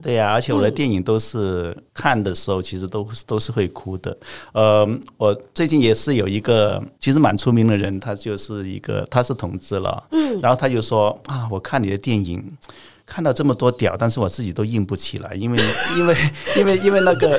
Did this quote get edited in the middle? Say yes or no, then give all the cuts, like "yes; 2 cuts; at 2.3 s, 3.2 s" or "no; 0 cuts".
no; 0 cuts